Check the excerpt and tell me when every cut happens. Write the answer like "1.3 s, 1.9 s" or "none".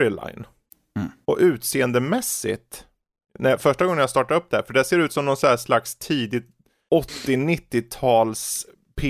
none